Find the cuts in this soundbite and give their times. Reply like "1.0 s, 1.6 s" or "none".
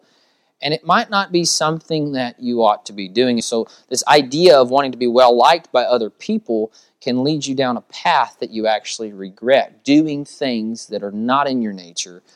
3.4 s

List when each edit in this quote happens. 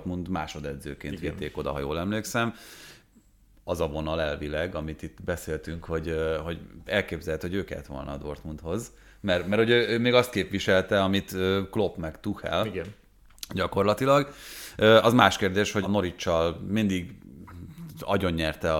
15.8 s

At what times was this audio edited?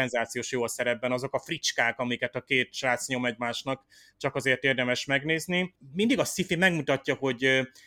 none

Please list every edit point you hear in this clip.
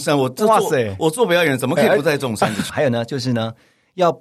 2.7 s

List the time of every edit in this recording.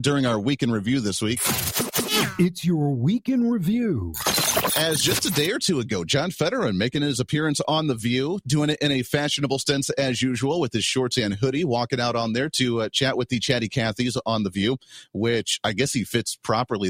none

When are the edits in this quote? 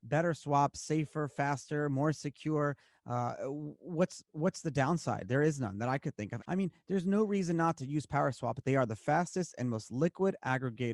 6.4 s, 8.6 s

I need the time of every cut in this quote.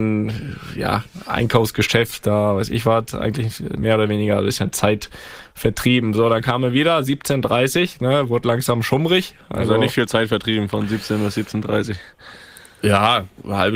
none

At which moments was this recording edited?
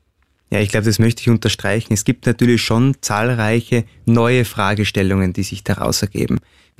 none

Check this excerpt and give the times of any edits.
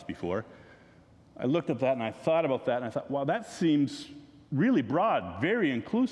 none

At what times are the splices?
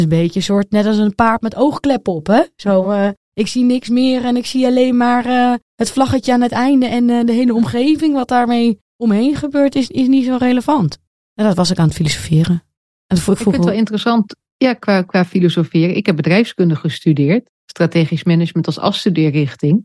none

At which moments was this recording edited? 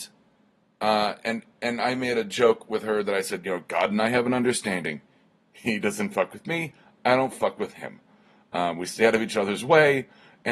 1.2 s

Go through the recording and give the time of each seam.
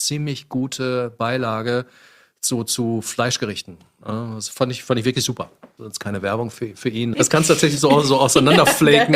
5.8 s, 7.1 s

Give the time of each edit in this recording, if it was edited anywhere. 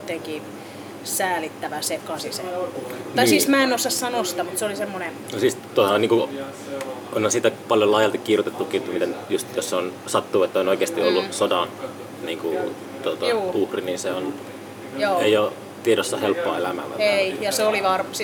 none

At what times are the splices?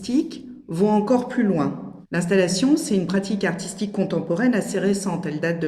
2.0 s

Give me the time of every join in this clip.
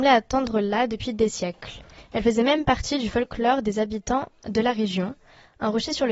none

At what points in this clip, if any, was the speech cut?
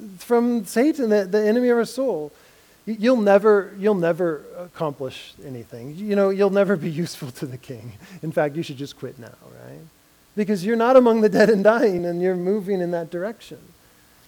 10.3 s, 12.0 s

